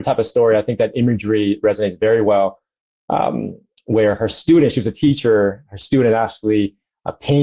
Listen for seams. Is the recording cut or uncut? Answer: uncut